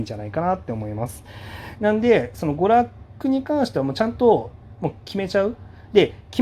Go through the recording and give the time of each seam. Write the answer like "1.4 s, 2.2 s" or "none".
1.8 s